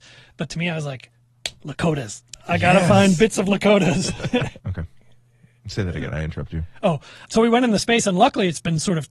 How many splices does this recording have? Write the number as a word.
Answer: two